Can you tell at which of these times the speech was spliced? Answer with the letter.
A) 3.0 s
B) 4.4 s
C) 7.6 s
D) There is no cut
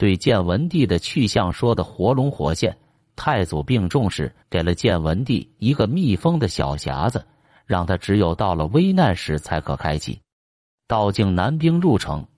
B